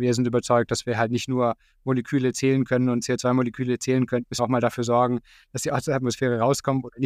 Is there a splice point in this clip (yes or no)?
no